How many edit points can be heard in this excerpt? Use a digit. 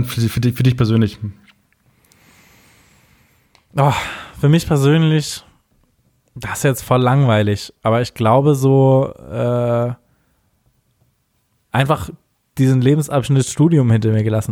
0